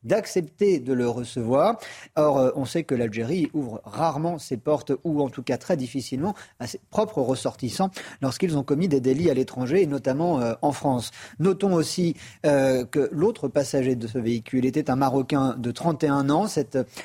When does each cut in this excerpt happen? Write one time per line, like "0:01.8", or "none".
none